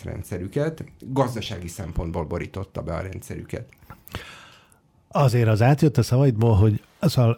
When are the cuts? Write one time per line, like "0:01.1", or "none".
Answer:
none